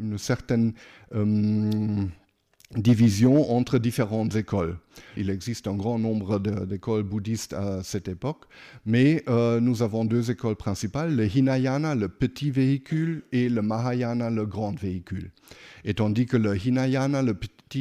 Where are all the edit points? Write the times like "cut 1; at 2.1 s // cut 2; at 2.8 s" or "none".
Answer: cut 1; at 5.2 s